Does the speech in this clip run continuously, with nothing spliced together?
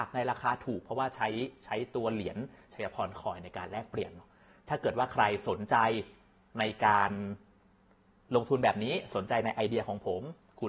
yes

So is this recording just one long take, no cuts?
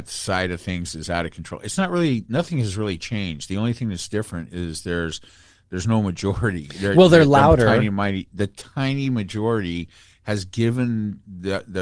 yes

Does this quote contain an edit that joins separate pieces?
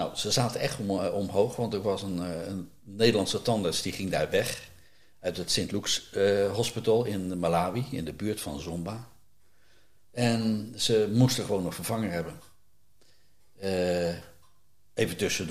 no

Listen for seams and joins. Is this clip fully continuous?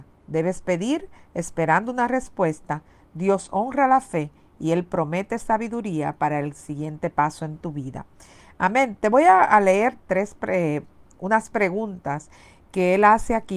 yes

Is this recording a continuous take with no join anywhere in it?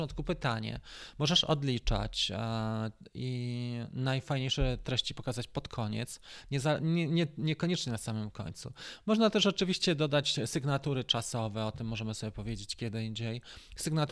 yes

